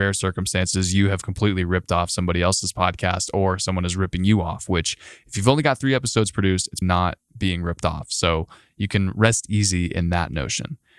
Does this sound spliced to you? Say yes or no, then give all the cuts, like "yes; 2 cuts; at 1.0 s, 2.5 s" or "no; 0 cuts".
yes; 1 cut; at 6.8 s